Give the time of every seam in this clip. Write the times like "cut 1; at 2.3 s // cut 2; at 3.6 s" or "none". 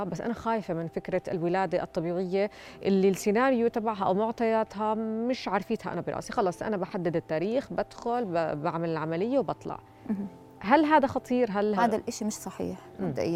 cut 1; at 11.8 s

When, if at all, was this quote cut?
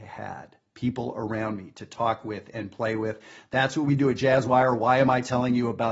none

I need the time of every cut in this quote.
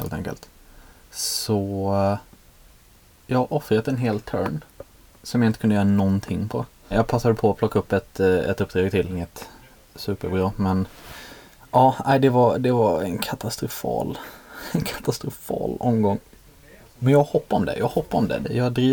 none

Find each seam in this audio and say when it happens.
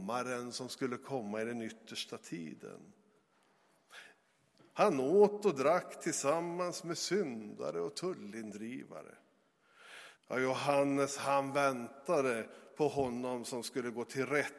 cut 1; at 4.6 s // cut 2; at 10.2 s

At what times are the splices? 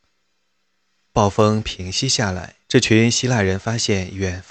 cut 1; at 1.1 s // cut 2; at 2.6 s

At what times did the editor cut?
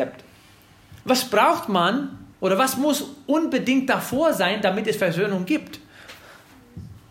cut 1; at 1.0 s // cut 2; at 2.3 s

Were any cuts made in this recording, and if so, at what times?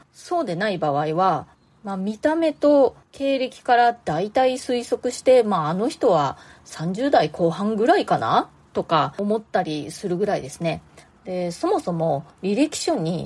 none

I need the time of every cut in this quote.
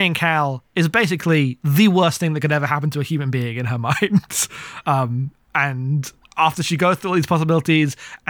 none

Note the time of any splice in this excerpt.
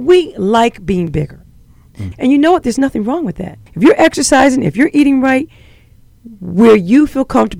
cut 1; at 2.1 s // cut 2; at 3.7 s

